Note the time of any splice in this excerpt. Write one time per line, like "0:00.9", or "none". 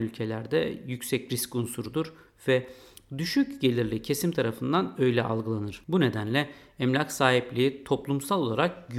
0:05.8